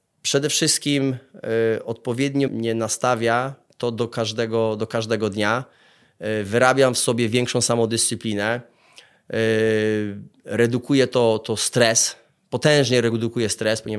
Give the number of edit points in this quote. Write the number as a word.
one